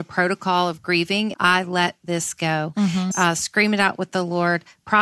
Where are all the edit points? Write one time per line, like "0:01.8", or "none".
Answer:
0:01.3
0:03.1